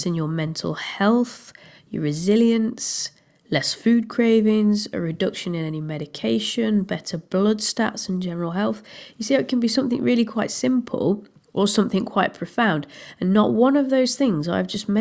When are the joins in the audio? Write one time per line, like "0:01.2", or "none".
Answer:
none